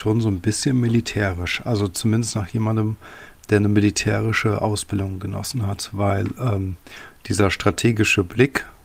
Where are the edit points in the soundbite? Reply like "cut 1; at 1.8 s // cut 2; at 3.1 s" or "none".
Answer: cut 1; at 7.2 s